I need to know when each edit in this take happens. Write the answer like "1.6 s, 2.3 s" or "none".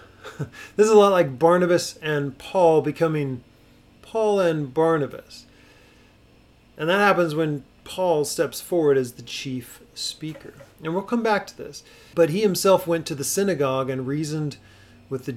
12.1 s